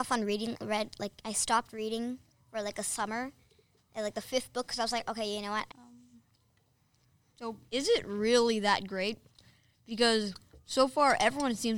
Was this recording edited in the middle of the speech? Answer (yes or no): yes